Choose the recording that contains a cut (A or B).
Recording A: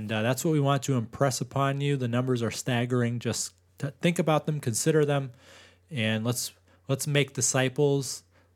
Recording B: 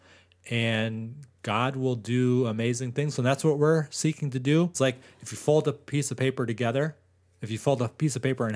B